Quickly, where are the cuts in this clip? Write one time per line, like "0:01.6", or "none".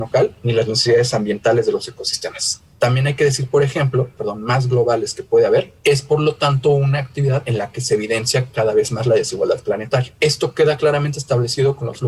0:04.2